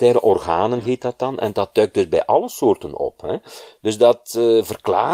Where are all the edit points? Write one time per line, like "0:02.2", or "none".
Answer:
none